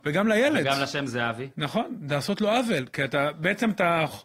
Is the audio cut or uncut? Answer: uncut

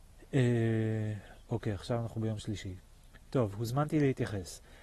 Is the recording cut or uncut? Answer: uncut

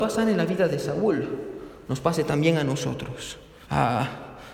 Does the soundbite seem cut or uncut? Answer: cut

